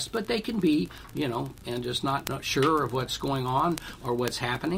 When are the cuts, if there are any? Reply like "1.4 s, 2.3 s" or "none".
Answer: 1.6 s